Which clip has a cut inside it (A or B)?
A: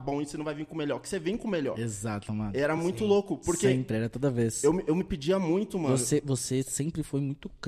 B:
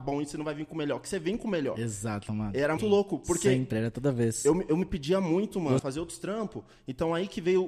B